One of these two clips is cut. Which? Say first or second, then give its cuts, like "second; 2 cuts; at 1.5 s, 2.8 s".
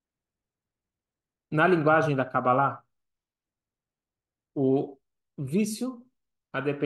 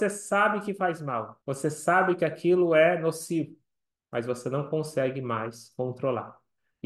second; 1 cut; at 1.4 s